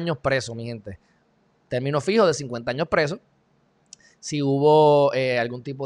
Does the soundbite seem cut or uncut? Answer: uncut